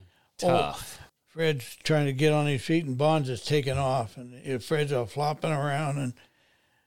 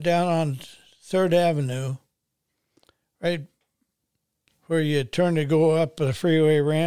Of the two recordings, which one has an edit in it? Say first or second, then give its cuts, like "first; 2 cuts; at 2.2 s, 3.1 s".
first; 1 cut; at 1.1 s